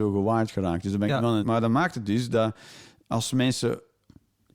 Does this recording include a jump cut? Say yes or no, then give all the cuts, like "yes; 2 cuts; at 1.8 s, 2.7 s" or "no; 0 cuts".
yes; 2 cuts; at 1.4 s, 3.0 s